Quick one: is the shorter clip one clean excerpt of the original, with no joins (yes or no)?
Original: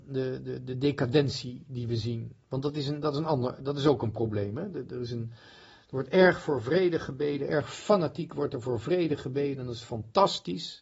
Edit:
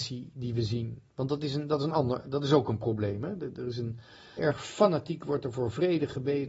no